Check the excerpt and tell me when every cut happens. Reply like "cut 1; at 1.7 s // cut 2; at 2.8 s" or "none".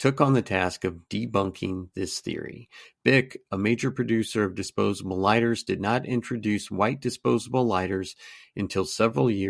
cut 1; at 2.9 s

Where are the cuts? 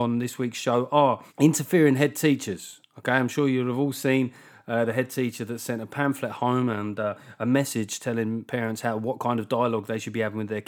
cut 1; at 1.3 s

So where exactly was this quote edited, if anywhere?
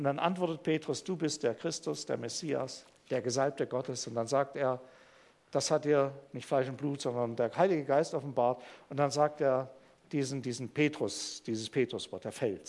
none

